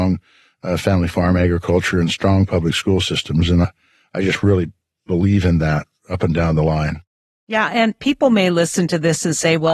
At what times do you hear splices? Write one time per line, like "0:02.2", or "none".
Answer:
none